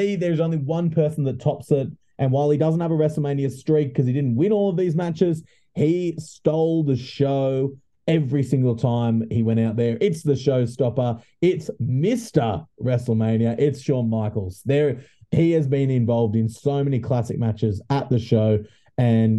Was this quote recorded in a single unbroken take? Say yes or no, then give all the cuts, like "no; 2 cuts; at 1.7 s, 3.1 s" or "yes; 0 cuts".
yes; 0 cuts